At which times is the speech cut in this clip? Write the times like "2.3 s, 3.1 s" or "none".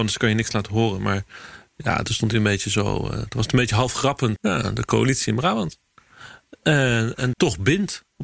4.4 s, 7.3 s